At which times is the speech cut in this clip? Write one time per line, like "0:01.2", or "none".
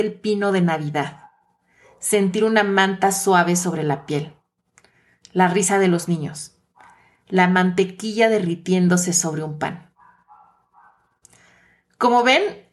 none